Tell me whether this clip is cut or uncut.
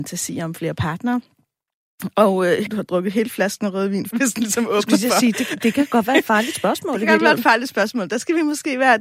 cut